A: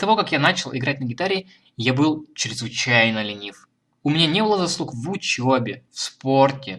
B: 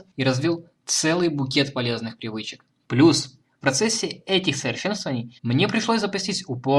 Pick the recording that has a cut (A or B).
B